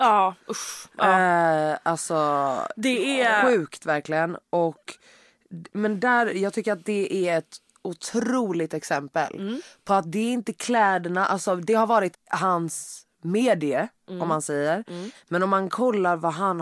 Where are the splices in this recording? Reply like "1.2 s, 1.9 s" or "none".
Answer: 12.1 s, 15.1 s